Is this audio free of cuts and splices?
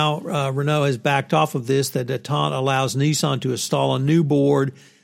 yes; 0 cuts

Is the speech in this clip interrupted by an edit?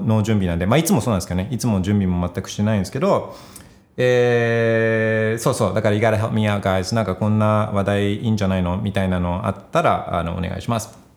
no; 0 cuts

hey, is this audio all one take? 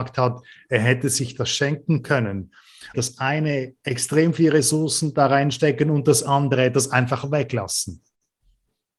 no; 1 cut; at 2.9 s

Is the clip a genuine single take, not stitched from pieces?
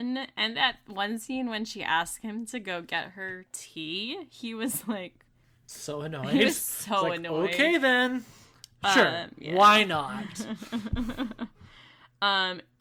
yes; 0 cuts

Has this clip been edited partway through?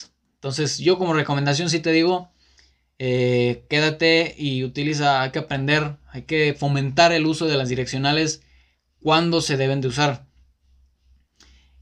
no; 0 cuts

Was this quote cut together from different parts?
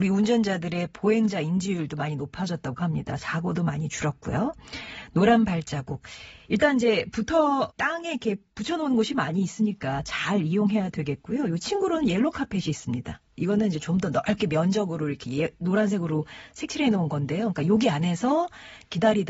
yes; 1 cut; at 7.7 s

